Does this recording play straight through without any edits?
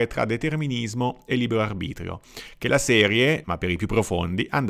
no; 1 cut; at 3.4 s

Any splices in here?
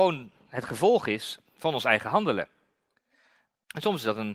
no; 0 cuts

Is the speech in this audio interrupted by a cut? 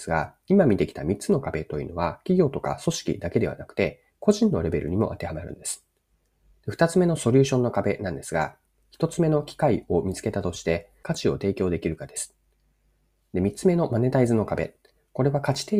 yes; 3 cuts; at 6.5 s, 11.0 s, 13.2 s

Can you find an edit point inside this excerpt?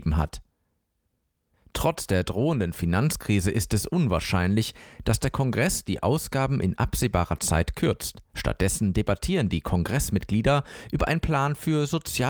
yes; 1 cut; at 8.3 s

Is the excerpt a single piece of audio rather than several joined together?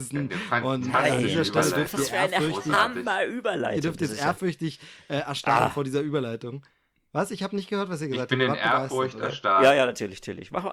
yes; 0 cuts

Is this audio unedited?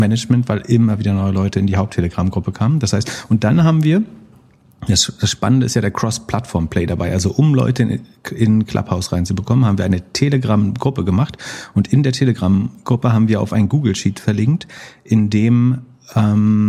yes; 0 cuts

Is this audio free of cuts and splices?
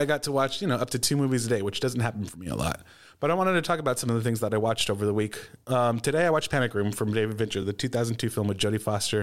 yes; 0 cuts

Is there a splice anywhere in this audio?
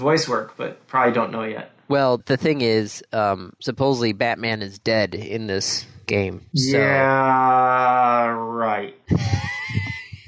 yes; 1 cut; at 2.2 s

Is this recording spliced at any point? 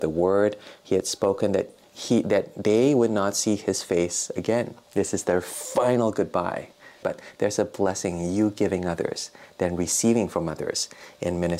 yes; 2 cuts; at 4.8 s, 7.0 s

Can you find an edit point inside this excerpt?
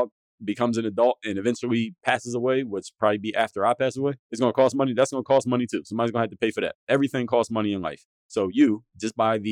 no; 0 cuts

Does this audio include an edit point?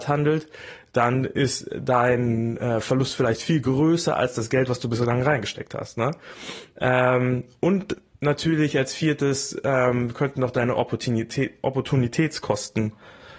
no; 0 cuts

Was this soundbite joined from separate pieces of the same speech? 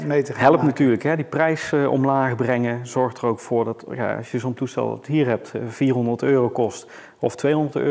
no; 0 cuts

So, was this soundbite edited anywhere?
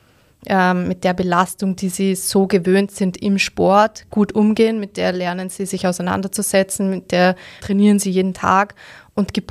yes; 1 cut; at 7.6 s

